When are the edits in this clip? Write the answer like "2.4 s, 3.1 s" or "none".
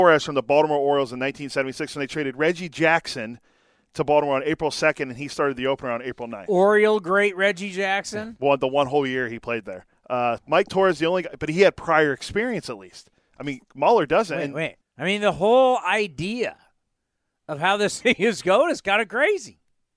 10.4 s, 14.8 s